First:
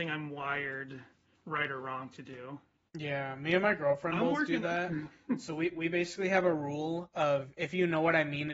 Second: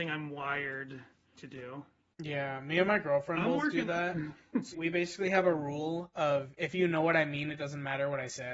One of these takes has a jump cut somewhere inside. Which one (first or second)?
second